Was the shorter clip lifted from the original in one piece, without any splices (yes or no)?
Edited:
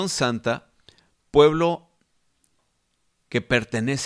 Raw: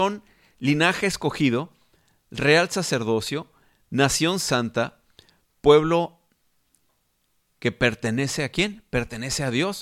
yes